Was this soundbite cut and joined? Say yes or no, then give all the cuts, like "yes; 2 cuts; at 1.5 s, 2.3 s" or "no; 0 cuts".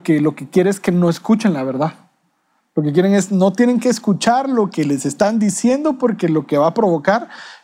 no; 0 cuts